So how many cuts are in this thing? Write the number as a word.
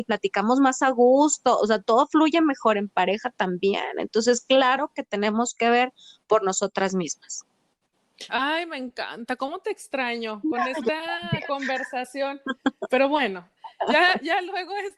two